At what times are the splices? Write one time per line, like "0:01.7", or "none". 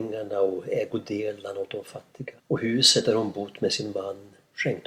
0:02.4

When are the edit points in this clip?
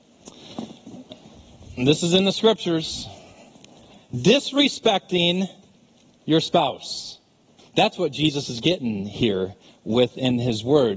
0:07.6

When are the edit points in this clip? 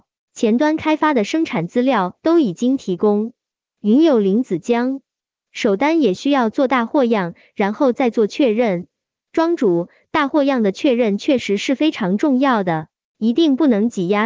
none

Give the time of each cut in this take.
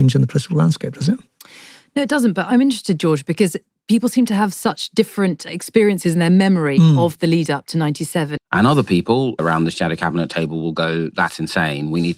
0:08.4

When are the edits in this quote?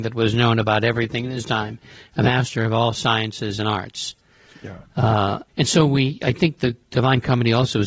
0:05.5

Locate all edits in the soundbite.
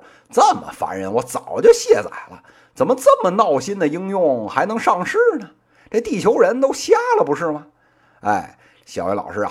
none

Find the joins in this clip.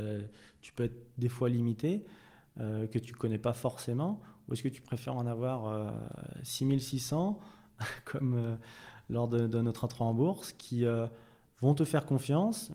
none

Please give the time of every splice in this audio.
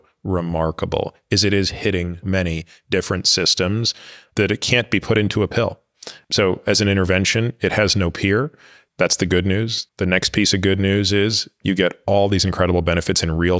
0:02.2
0:09.9
0:11.6

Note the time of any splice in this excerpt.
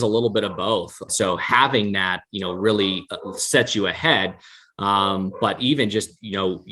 0:01.1

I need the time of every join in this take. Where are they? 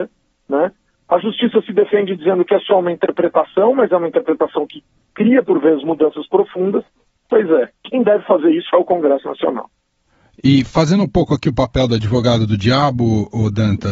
0:01.0
0:07.2

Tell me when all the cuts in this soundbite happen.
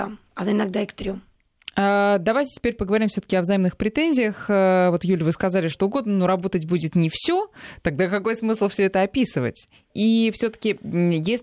0:05.7
0:09.9

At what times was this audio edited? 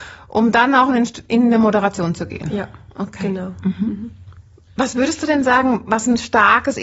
none

